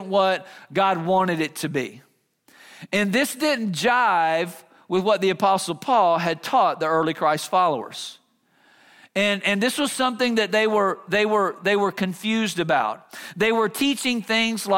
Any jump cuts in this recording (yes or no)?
no